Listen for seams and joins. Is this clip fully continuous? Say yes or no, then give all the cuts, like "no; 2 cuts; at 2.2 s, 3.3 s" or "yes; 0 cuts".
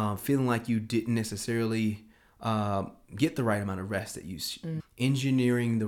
no; 1 cut; at 4.8 s